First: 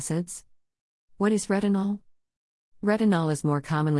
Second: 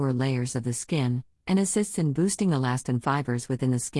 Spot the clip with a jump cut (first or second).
first